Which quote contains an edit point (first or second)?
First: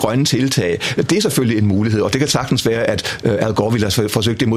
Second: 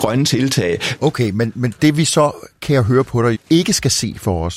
second